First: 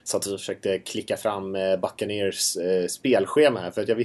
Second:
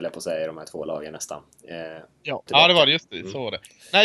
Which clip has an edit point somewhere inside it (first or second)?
second